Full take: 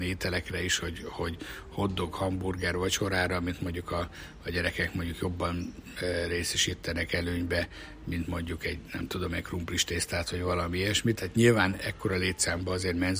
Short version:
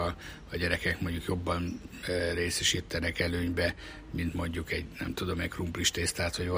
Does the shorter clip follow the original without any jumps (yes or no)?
yes